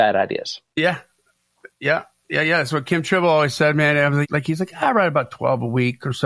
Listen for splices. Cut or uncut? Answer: cut